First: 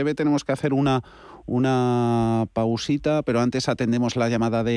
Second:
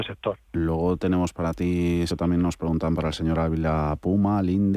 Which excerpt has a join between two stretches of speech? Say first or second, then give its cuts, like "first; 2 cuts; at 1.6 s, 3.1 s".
second; 1 cut; at 2.1 s